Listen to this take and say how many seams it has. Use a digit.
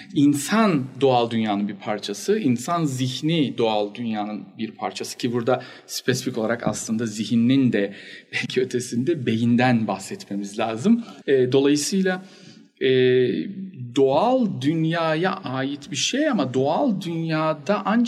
1